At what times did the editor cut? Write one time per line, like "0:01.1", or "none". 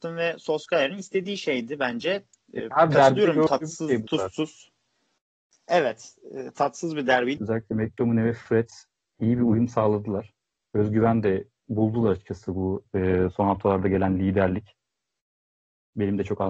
0:07.4